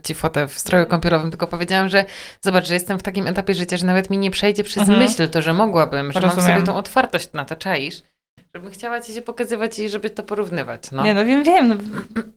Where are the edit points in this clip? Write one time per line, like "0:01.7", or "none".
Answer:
none